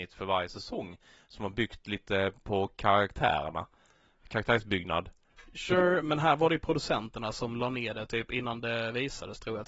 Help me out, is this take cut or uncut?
uncut